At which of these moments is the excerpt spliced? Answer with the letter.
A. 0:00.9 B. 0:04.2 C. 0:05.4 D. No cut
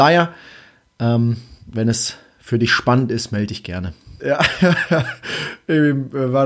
B